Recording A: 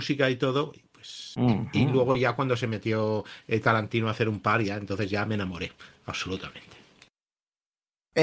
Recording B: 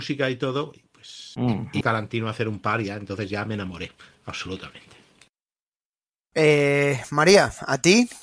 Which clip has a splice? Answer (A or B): B